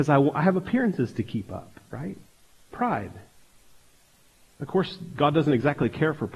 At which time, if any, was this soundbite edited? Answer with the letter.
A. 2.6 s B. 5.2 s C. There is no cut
C